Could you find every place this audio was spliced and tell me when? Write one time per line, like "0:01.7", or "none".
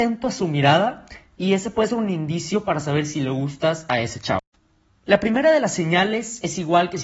0:04.9